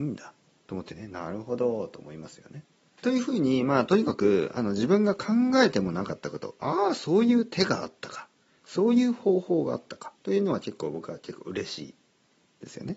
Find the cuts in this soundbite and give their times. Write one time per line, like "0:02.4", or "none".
0:03.0
0:10.2